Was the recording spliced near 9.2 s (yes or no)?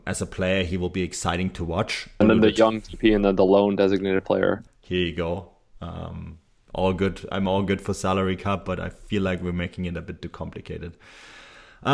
no